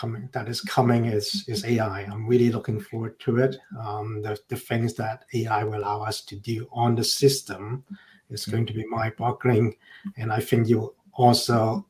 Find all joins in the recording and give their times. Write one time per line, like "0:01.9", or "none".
none